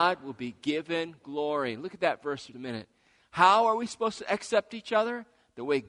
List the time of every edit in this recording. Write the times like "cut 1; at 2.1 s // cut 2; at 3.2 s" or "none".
cut 1; at 2.5 s